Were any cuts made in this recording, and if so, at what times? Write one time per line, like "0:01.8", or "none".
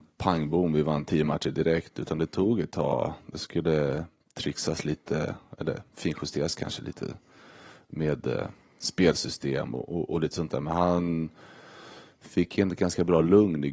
none

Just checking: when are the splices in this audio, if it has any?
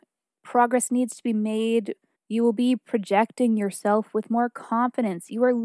0:02.1

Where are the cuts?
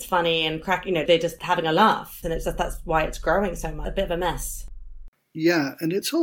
0:02.2

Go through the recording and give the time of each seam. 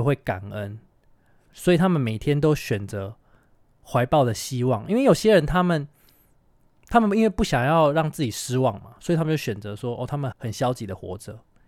0:10.3

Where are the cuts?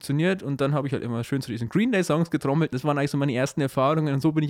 0:02.7

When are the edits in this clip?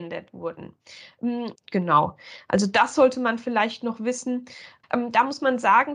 0:01.5
0:04.8

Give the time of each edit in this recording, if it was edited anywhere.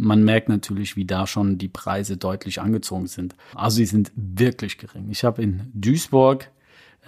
0:03.5

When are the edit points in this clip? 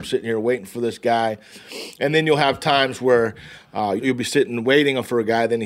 0:04.0

